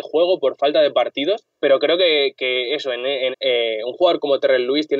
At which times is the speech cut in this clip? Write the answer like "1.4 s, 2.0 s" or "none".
1.5 s, 3.3 s